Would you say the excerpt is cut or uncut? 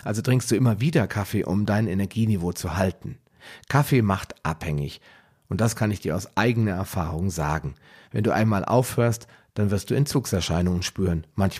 uncut